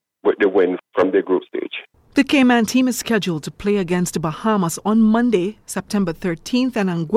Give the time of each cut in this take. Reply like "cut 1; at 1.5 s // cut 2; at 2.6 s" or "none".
none